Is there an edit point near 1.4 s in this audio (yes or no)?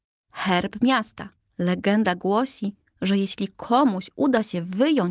yes